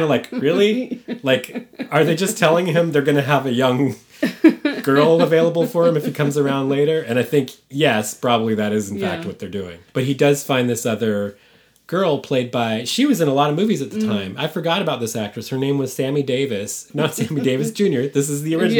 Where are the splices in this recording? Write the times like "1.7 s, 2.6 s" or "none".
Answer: 9.9 s, 16.9 s